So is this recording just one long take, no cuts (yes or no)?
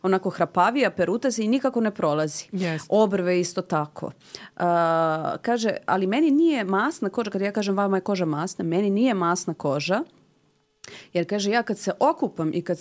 yes